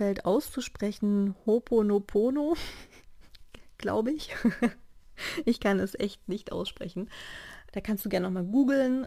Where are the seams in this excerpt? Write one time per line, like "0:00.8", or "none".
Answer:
0:07.7